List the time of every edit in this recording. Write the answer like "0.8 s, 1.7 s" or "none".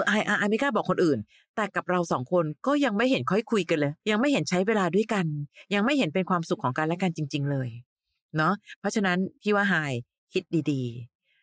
4.0 s